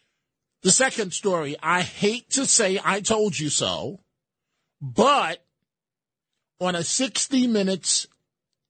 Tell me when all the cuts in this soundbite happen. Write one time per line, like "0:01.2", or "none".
none